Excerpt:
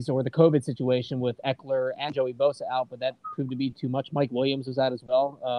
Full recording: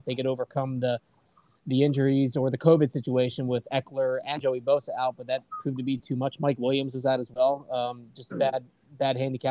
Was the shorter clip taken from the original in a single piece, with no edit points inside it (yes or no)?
yes